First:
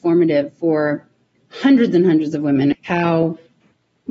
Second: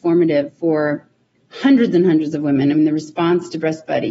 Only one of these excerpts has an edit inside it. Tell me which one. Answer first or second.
first